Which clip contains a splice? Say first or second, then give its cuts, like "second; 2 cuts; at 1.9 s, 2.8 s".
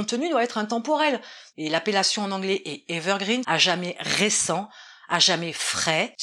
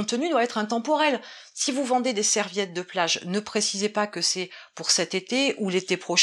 first; 2 cuts; at 1.5 s, 3.4 s